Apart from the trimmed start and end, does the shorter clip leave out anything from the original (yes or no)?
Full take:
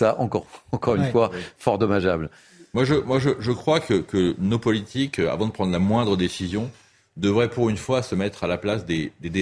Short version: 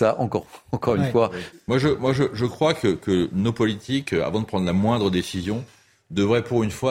yes